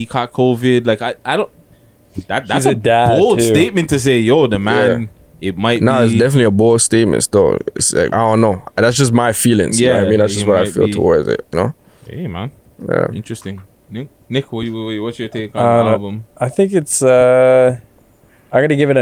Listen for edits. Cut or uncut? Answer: cut